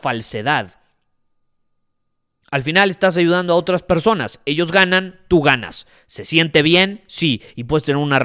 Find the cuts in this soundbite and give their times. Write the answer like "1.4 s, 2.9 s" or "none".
none